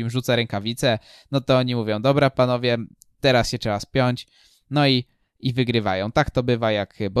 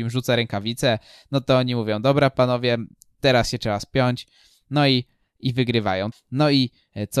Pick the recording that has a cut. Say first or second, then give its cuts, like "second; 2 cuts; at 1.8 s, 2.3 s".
second; 1 cut; at 6.1 s